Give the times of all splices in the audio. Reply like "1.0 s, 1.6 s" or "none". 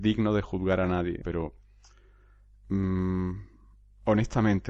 1.2 s